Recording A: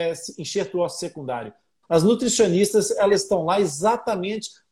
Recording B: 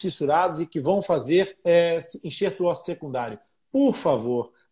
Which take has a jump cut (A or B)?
A